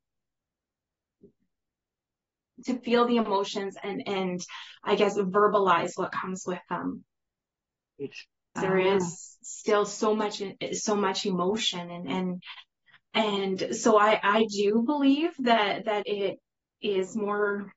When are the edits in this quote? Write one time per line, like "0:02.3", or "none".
0:08.6
0:16.0

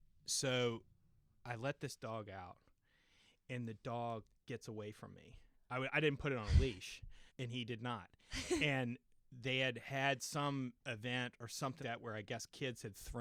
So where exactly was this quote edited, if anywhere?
0:07.3
0:11.8

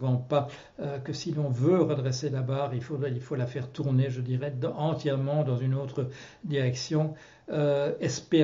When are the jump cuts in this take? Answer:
none

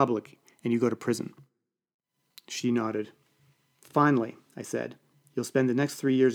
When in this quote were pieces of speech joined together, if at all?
none

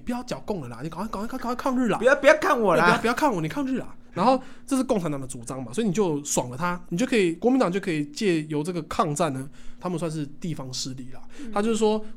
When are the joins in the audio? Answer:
0:06.8
0:09.8

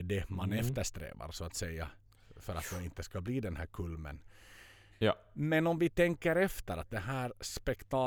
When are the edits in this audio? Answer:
0:04.9

